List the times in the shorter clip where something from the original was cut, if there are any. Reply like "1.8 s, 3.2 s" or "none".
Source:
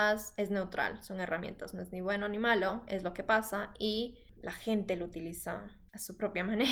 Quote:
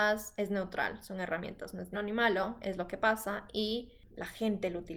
1.9 s